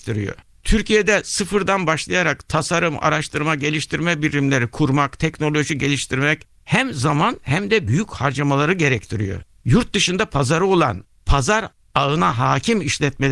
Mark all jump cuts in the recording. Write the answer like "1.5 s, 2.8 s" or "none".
none